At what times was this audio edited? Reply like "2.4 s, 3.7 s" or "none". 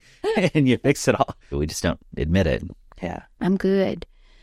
1.5 s, 2.9 s